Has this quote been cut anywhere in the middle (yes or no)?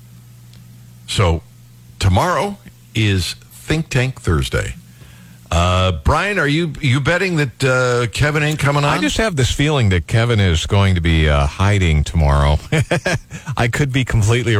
no